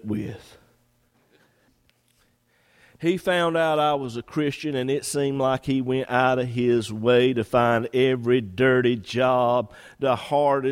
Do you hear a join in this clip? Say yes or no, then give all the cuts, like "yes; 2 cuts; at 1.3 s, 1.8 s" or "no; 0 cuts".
yes; 1 cut; at 1.1 s